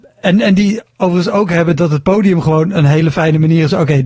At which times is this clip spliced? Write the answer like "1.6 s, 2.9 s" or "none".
none